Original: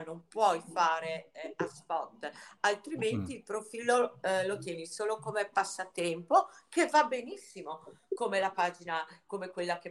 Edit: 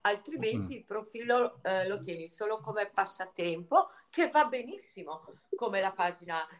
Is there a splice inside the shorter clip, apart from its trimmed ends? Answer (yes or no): no